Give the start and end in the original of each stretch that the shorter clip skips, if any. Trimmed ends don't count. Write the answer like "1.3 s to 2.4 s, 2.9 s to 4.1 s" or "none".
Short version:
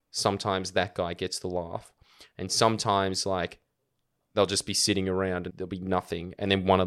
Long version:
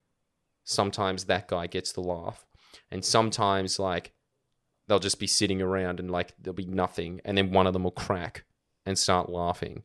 6.0 s to 6.4 s